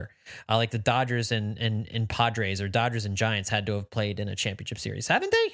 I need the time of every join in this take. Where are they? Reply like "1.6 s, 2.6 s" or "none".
none